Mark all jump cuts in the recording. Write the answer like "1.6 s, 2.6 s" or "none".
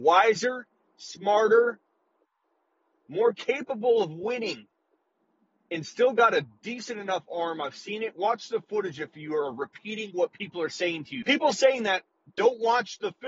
11.2 s